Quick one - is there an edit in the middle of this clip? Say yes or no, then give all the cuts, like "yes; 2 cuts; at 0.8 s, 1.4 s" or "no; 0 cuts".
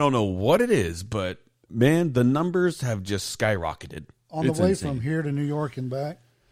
no; 0 cuts